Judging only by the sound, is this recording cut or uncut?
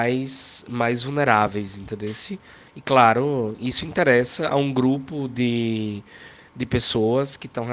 uncut